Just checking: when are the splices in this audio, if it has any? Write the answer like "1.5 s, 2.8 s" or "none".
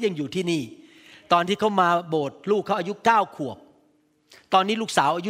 none